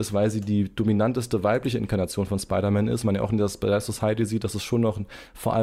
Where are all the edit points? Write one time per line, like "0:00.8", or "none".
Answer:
none

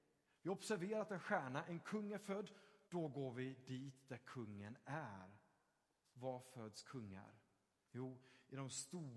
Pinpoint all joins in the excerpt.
0:02.8

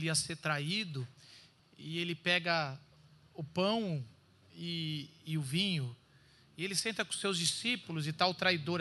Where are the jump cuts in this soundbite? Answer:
0:01.6

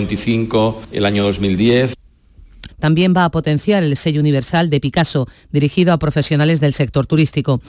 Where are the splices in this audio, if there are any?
0:02.7

